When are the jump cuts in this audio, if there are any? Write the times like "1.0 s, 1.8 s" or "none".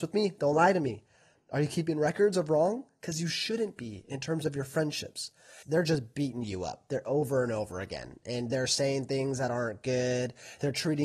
5.6 s

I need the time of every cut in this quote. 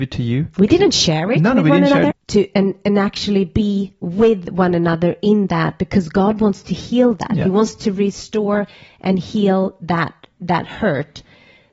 2.1 s

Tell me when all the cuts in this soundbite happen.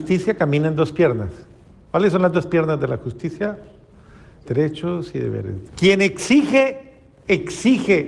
4.4 s, 5.7 s

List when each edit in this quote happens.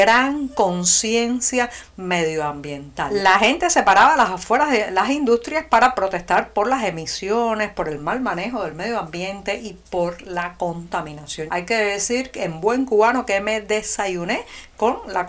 11.5 s

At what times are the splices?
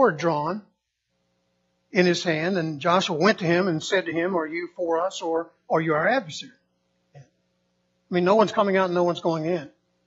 7.1 s

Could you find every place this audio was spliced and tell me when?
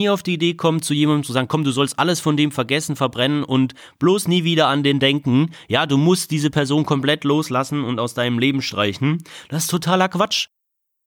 none

